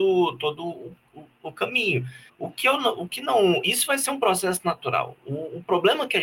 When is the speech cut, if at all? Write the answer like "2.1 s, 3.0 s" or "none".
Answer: 2.3 s